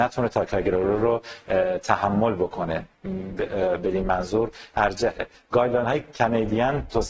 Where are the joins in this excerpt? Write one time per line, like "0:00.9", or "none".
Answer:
none